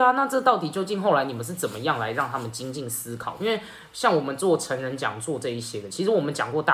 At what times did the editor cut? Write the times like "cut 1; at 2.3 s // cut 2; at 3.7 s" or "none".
none